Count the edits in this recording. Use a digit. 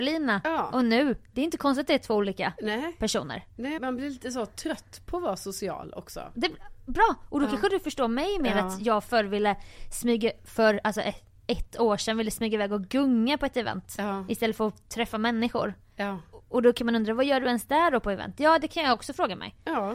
1